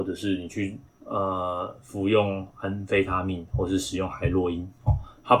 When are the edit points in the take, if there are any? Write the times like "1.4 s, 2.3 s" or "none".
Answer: none